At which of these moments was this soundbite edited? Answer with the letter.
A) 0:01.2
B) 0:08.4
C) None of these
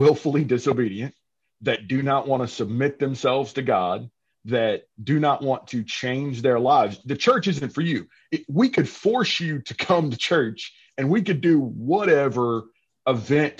C